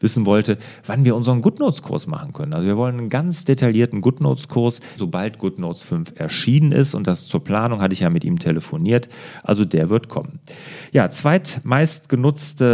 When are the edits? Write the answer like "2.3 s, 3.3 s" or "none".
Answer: 5.0 s